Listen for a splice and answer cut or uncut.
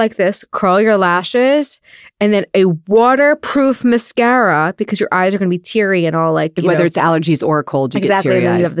uncut